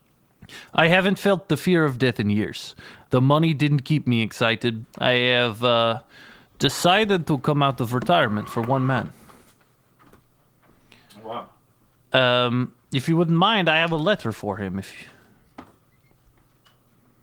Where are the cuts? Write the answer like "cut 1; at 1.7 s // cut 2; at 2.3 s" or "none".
cut 1; at 3.1 s // cut 2; at 4.8 s

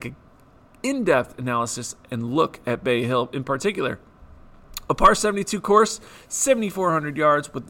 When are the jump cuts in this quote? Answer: none

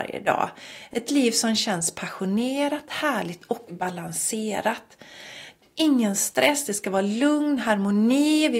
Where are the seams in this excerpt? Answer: none

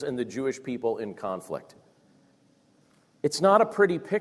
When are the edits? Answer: none

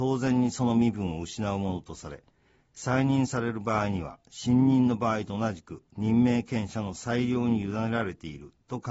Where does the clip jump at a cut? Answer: none

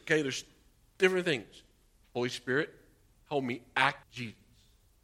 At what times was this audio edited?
cut 1; at 2.0 s // cut 2; at 4.0 s

